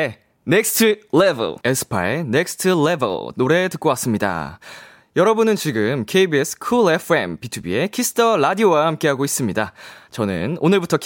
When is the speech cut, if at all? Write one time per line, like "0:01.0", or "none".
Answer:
0:01.6